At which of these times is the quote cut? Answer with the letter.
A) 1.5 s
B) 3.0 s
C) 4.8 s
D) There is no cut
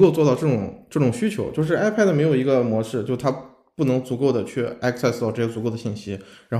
D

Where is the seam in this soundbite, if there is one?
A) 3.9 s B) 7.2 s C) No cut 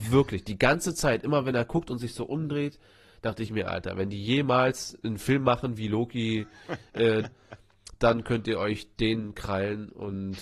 B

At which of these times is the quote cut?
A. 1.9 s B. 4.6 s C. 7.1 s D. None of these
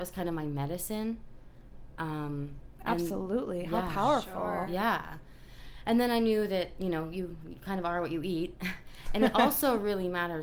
D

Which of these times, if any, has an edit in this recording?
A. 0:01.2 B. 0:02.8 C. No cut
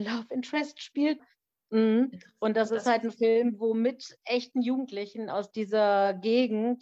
A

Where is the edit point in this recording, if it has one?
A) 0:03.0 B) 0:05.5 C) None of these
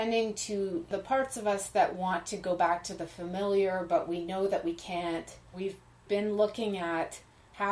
B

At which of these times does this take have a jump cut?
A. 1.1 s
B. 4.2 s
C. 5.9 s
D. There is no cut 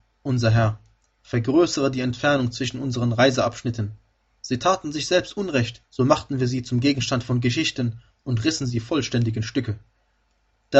C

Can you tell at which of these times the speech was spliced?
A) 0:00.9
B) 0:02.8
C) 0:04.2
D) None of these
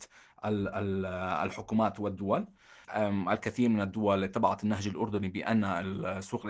B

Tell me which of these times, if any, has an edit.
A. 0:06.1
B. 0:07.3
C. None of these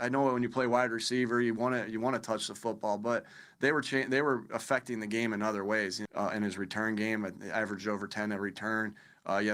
A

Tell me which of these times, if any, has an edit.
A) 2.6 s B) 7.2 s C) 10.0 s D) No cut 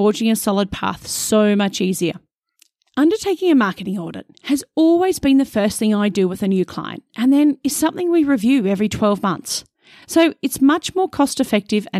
C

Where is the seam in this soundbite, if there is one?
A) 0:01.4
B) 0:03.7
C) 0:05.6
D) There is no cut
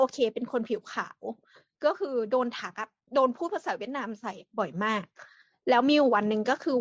D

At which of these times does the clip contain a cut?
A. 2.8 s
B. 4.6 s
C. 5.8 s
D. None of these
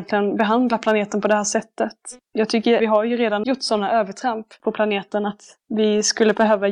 A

